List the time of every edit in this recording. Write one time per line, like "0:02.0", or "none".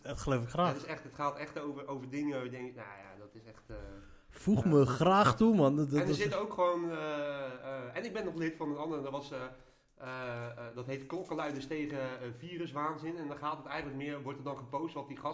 none

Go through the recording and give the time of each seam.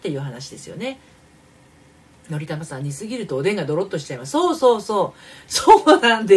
none

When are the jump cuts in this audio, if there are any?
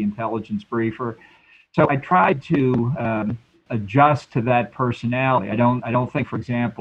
0:03.7

